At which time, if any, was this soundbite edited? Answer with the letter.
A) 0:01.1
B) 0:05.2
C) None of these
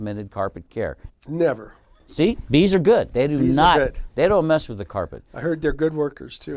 A